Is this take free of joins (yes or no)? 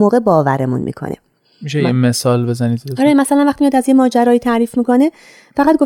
yes